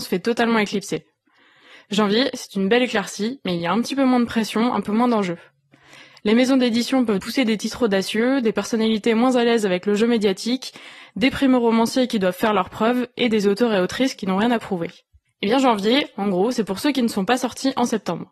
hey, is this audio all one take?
no; 2 cuts; at 7.2 s, 15.3 s

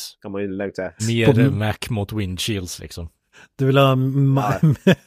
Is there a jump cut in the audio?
yes; 1 cut; at 1.0 s

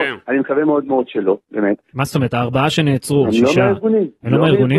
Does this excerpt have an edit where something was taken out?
yes; 2 cuts; at 1.9 s, 3.2 s

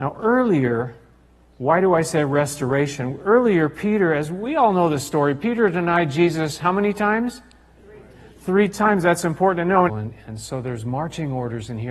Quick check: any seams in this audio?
yes; 1 cut; at 9.9 s

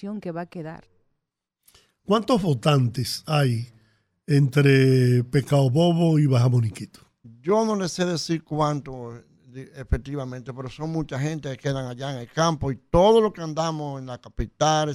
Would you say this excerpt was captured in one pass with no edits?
yes; 0 cuts

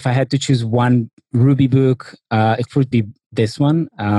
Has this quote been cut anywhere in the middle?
yes; 1 cut; at 2.9 s

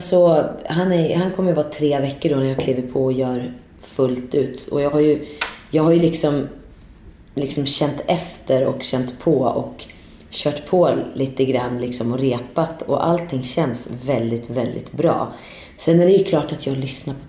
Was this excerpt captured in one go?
yes; 0 cuts

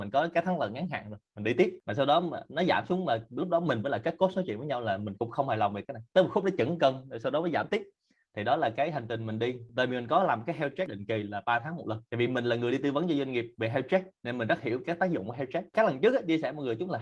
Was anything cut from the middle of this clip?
yes; 1 cut; at 6.1 s

